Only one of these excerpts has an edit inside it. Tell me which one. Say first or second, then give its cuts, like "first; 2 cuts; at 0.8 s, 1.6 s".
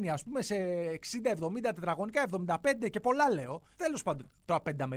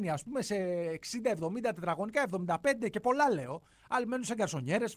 first; 1 cut; at 3.7 s